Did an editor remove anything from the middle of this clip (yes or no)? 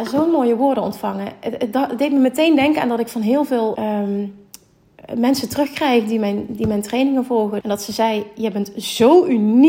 yes